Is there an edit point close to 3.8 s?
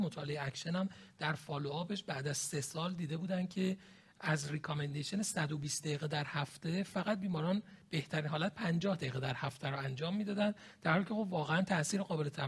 no; 0 cuts

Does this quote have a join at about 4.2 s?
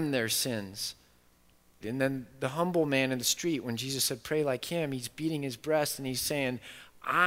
no; 1 cut; at 1.8 s

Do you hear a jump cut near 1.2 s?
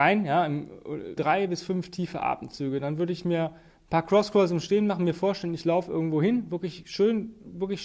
yes; 1 cut; at 1.2 s

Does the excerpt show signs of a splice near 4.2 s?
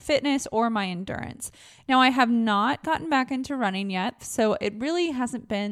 yes; 1 cut; at 4.2 s

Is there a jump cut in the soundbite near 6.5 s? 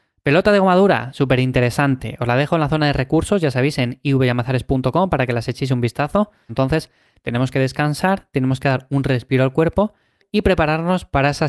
yes; 1 cut; at 6.5 s

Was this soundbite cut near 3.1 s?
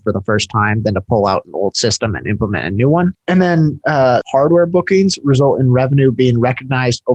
yes; 2 cuts; at 3.1 s, 4.2 s

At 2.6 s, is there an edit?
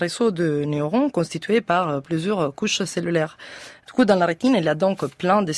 no; 1 cut; at 3.8 s

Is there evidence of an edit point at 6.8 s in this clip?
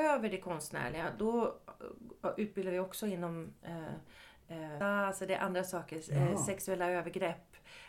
no; 1 cut; at 4.8 s

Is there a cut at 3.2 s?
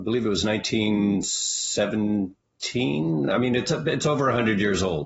no; 0 cuts

